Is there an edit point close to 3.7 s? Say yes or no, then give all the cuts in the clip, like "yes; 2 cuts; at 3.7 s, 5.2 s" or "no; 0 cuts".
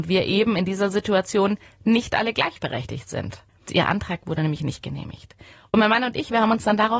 yes; 1 cut; at 3.7 s